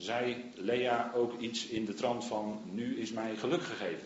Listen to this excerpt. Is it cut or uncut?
uncut